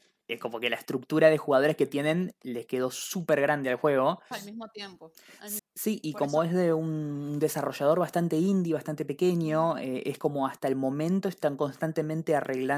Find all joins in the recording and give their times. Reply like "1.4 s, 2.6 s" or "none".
4.3 s, 5.6 s